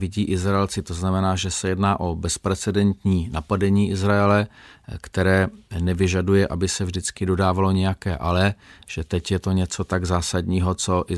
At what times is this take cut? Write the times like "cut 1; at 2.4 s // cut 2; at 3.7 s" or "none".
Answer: none